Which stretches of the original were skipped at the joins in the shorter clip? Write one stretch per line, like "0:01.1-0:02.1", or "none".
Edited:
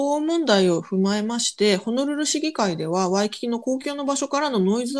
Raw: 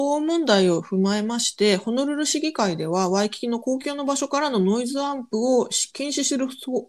none